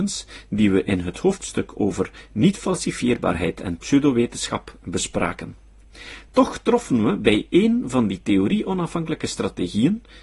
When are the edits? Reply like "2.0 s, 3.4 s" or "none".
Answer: 6.3 s